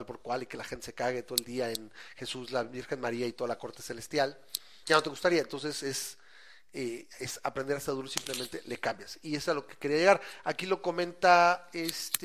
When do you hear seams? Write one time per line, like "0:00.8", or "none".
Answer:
0:04.8